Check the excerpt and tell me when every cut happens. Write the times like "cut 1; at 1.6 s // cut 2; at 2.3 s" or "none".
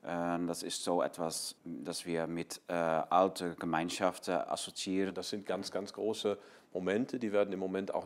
cut 1; at 1.6 s // cut 2; at 5.1 s